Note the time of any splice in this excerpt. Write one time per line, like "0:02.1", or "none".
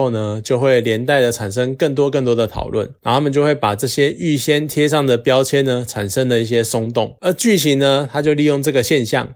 none